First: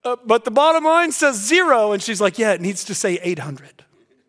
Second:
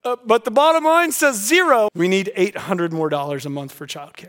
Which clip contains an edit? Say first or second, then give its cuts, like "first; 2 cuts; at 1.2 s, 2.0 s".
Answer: second; 1 cut; at 1.9 s